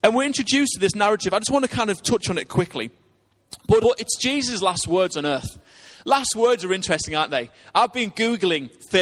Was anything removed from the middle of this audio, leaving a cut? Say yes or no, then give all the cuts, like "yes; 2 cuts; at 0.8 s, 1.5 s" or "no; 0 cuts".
yes; 1 cut; at 3.8 s